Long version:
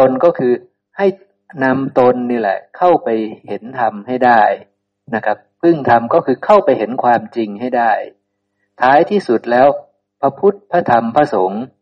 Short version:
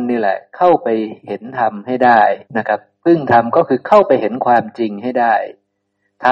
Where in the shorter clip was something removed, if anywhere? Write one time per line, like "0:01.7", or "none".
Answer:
0:02.5